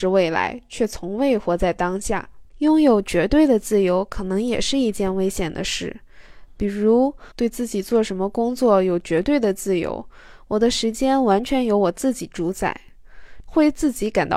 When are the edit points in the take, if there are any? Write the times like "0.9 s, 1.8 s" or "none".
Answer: 2.5 s, 7.3 s, 13.4 s